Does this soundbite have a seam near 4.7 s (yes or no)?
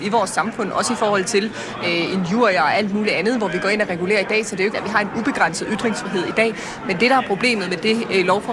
yes